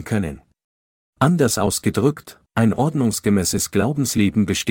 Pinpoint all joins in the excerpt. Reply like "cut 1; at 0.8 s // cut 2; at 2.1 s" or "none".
cut 1; at 1.1 s